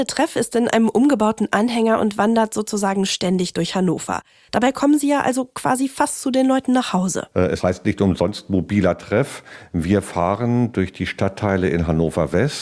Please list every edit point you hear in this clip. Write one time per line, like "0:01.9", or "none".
0:07.3